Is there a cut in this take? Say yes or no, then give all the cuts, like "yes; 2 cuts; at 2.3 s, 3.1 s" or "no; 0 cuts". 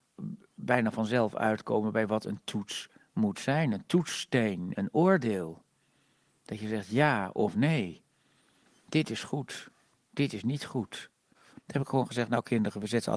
yes; 1 cut; at 11.5 s